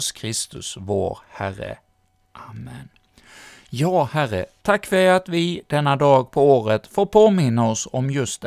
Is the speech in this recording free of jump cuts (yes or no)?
yes